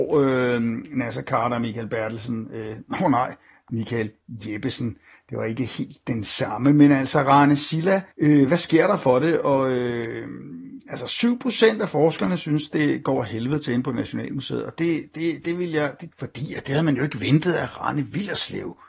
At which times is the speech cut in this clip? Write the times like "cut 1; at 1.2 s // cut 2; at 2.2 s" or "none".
cut 1; at 8.1 s // cut 2; at 16.1 s